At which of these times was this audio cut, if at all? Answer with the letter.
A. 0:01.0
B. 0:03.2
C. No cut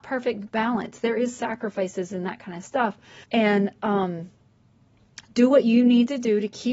B